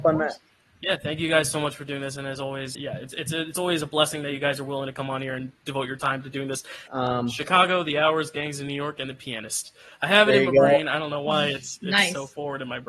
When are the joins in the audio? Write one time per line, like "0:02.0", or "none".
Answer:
0:02.8
0:06.9